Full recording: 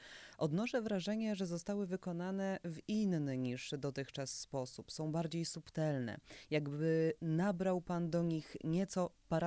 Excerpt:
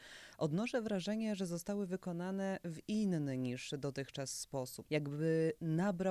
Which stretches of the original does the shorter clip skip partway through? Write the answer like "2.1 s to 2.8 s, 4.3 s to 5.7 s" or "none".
4.9 s to 6.5 s